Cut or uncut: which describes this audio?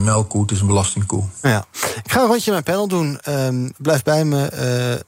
uncut